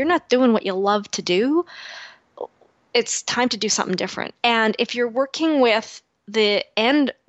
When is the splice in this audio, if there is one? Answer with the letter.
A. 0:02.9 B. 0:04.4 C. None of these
B